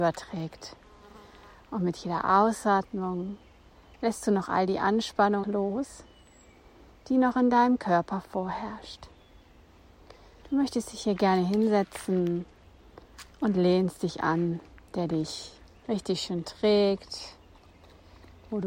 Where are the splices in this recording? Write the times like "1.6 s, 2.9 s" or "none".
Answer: 5.4 s, 10.4 s, 14.9 s